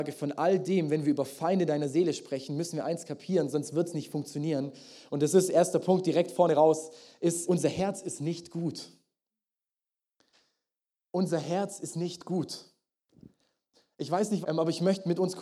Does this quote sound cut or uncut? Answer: cut